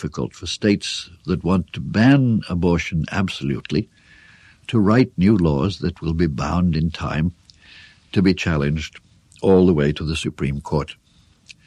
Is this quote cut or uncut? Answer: uncut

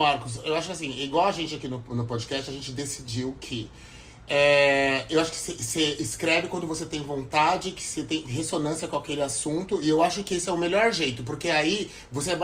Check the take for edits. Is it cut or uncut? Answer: uncut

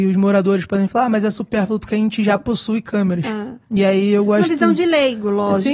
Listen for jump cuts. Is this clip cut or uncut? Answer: uncut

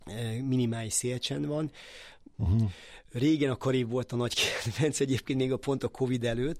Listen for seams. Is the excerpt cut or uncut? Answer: cut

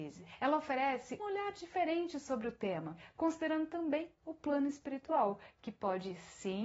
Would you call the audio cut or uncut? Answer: cut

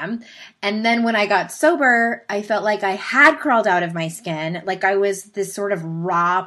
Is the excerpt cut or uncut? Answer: uncut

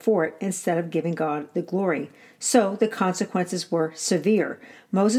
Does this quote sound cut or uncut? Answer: uncut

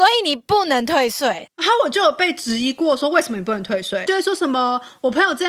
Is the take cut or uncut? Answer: uncut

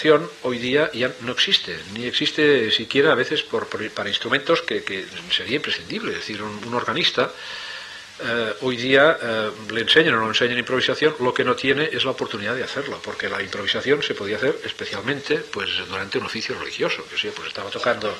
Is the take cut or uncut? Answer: uncut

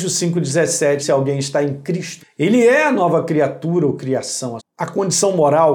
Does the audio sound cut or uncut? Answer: cut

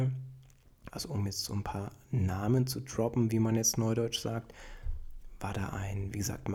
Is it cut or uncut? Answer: cut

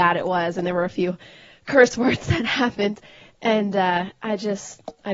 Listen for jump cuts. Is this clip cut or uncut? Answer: uncut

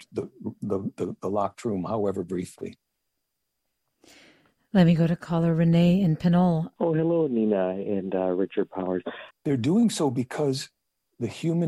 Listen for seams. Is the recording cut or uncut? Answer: cut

